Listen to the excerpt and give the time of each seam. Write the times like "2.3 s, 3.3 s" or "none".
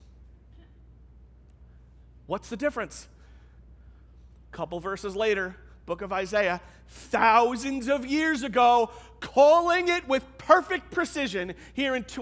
none